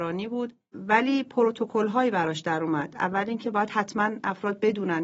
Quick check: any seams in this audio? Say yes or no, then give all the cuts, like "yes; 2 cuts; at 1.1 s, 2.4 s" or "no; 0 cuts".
no; 0 cuts